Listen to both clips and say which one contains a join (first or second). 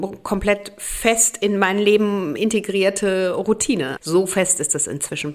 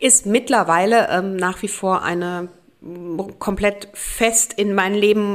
first